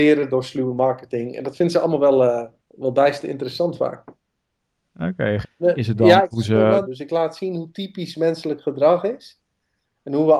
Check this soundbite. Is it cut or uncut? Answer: cut